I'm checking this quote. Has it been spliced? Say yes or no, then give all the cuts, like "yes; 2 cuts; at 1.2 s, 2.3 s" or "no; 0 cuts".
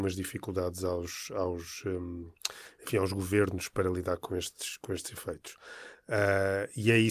no; 0 cuts